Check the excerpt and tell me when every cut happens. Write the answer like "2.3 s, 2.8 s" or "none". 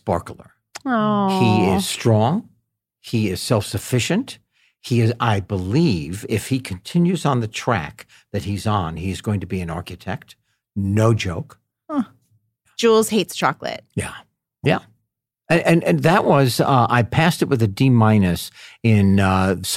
12.6 s, 14.6 s